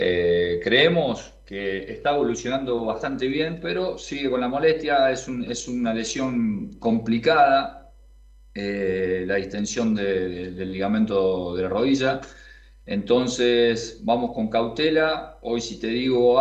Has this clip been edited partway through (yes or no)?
no